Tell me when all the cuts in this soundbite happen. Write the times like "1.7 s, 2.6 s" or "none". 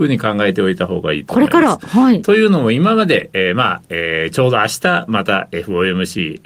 none